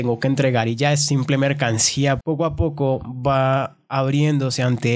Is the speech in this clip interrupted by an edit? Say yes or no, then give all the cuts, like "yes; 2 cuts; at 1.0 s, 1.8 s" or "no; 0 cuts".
yes; 1 cut; at 2.2 s